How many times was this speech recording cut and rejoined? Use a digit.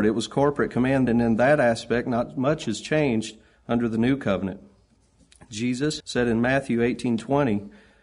2